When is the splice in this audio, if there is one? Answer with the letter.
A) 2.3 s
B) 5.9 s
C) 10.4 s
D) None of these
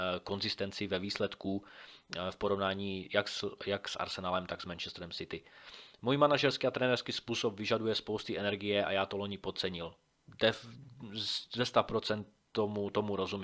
D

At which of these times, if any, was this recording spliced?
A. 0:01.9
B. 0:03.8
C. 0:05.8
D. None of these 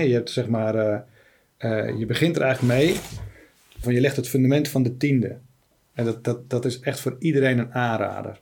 B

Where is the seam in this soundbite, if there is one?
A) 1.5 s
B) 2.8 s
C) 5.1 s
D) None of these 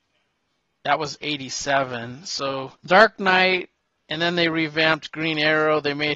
B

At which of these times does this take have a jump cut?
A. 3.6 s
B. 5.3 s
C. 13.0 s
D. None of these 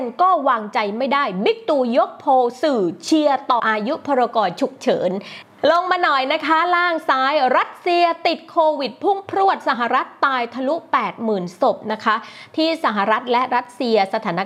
A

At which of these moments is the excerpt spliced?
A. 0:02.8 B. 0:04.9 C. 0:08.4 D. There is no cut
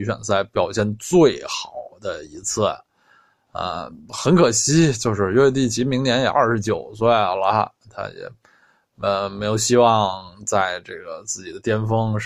D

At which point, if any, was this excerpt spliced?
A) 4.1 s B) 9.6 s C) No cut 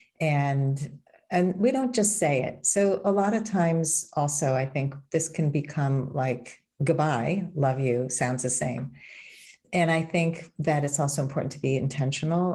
C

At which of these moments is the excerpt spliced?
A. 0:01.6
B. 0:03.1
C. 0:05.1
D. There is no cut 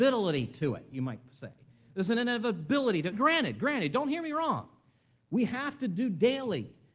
B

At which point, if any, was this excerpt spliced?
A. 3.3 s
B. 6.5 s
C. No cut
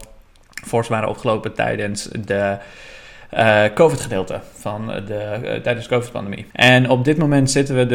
B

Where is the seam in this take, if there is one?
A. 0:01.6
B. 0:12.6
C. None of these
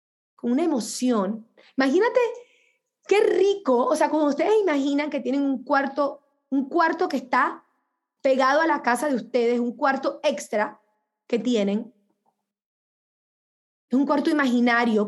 C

